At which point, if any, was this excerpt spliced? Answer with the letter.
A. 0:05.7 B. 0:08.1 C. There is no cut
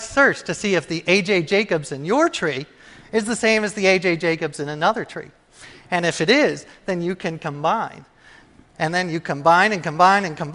C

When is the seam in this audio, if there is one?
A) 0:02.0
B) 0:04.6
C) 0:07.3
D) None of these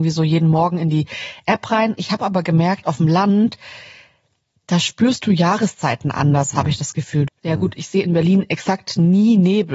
C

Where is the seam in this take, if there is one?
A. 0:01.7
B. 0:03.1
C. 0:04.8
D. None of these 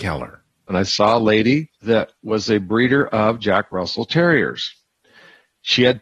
A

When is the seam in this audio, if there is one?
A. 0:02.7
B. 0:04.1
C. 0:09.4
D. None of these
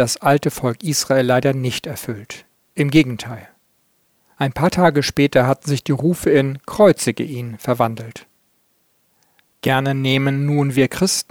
D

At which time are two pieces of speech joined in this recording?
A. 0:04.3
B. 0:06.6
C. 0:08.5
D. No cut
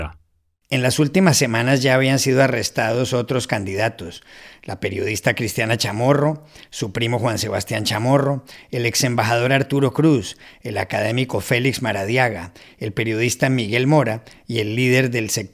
D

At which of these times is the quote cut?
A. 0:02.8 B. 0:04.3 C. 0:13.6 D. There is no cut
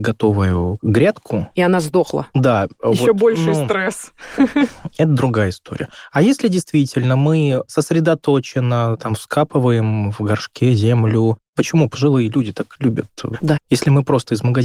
C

